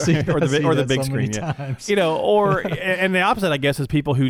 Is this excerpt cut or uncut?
uncut